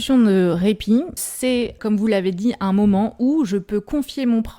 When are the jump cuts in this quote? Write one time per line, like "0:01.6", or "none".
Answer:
0:01.2